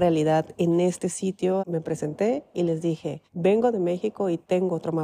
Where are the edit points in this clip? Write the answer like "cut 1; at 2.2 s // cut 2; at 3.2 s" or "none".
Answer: cut 1; at 1.6 s // cut 2; at 3.3 s